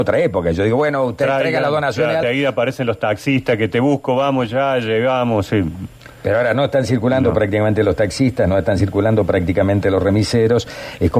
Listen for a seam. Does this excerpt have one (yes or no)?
yes